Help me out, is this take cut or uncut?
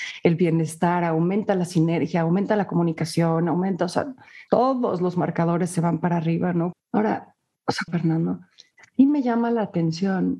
cut